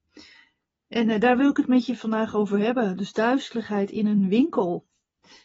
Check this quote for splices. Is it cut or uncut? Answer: uncut